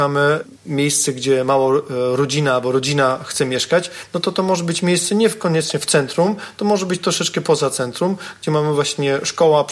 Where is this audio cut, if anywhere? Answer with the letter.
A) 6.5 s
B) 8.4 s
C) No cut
C